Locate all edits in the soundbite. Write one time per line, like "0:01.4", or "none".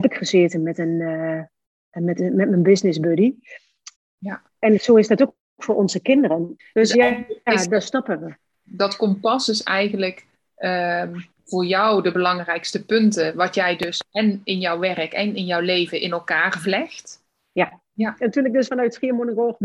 0:04.0
0:06.6
0:17.9